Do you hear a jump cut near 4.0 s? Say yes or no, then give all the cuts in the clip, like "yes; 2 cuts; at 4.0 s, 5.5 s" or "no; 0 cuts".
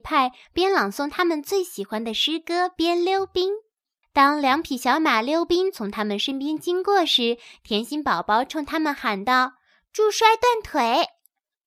yes; 1 cut; at 4.0 s